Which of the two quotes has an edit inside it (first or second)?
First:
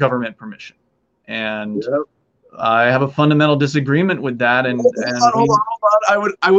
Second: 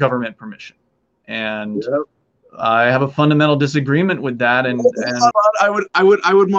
second